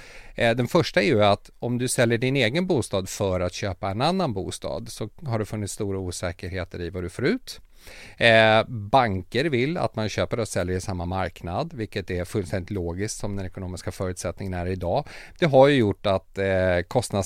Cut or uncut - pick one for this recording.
cut